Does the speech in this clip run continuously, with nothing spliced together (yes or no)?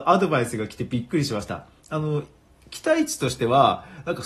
yes